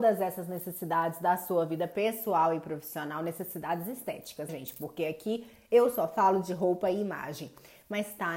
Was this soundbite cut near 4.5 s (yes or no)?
yes